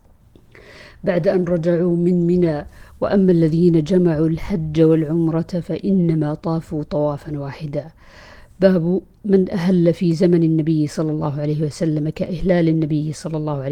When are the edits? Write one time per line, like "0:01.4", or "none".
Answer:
none